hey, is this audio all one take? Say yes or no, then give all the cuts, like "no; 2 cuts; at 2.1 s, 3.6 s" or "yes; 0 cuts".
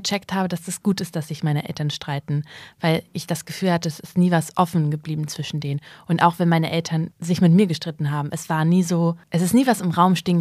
yes; 0 cuts